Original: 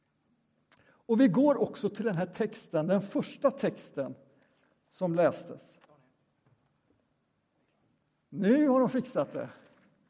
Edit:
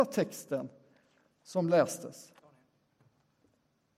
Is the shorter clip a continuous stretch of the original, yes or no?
yes